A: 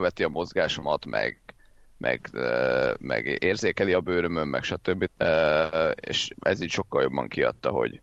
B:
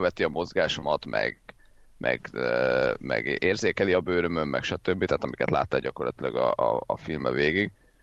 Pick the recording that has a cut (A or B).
A